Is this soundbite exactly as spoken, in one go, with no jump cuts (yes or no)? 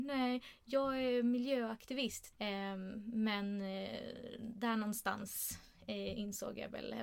no